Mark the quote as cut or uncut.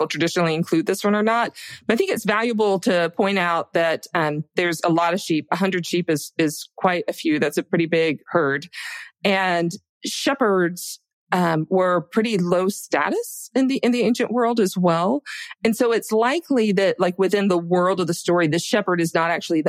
uncut